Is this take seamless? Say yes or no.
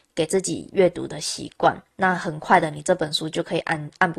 yes